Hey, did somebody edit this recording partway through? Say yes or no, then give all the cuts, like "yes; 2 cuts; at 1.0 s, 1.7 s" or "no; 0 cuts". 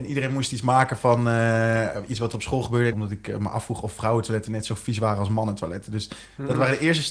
yes; 1 cut; at 2.9 s